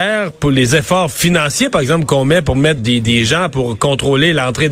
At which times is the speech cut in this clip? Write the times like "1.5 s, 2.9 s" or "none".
2.8 s